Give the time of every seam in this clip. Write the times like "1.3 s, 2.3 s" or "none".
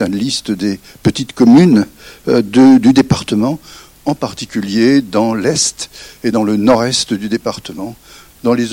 none